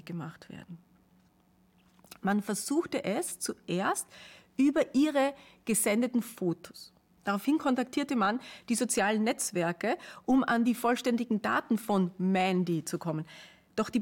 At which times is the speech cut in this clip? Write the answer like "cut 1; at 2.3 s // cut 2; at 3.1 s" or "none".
cut 1; at 7.1 s